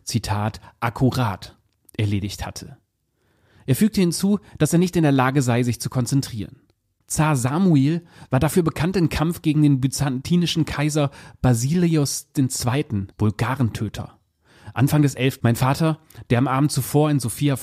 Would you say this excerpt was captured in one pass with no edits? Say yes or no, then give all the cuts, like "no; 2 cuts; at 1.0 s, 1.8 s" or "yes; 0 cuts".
no; 3 cuts; at 7.0 s, 13.1 s, 15.4 s